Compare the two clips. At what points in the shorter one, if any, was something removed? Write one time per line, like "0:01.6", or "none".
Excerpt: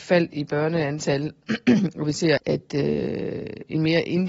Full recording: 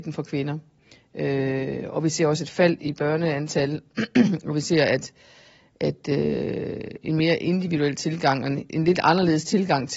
0:02.4